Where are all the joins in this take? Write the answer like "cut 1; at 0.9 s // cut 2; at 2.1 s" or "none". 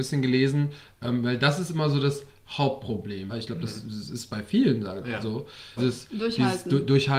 cut 1; at 3.3 s // cut 2; at 5.8 s